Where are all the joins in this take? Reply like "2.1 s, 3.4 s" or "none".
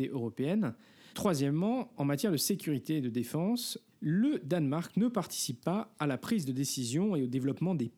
1.1 s, 3.9 s